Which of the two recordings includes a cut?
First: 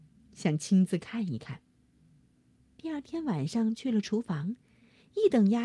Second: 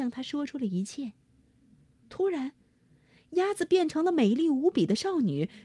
second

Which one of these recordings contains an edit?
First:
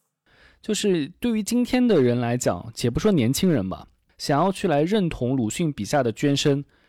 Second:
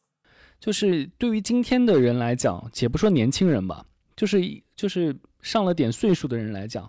first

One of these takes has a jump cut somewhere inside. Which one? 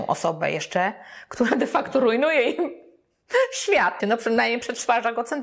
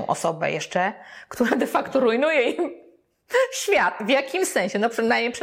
first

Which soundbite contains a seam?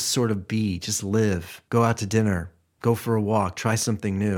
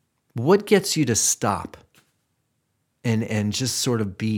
first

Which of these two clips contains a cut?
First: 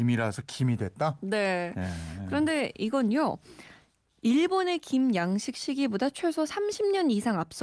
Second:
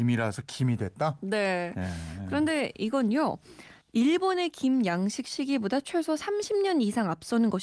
second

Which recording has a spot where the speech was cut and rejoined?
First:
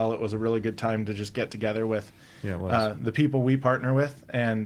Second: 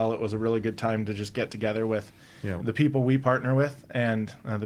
second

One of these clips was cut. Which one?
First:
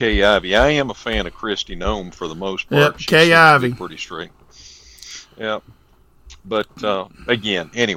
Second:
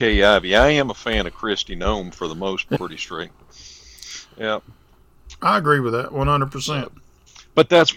second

